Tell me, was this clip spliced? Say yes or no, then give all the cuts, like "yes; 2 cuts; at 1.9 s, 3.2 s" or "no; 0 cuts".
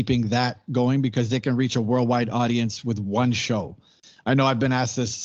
no; 0 cuts